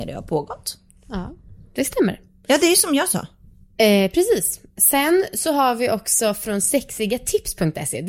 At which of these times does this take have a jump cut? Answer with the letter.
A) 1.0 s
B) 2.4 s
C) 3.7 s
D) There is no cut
D